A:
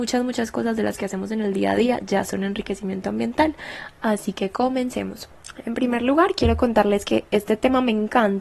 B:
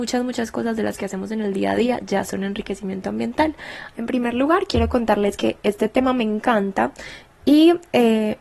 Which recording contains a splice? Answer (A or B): B